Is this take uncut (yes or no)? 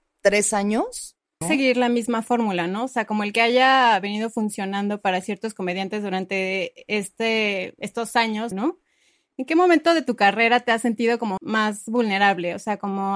no